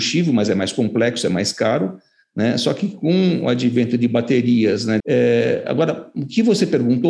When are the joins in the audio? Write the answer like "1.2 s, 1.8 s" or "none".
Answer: 5.0 s